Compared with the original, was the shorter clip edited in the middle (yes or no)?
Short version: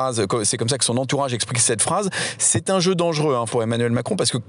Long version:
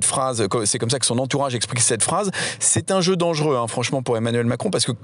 yes